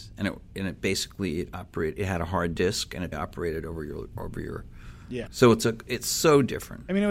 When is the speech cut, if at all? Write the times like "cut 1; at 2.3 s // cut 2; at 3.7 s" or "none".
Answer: cut 1; at 3.1 s // cut 2; at 5.3 s